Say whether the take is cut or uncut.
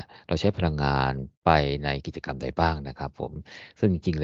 cut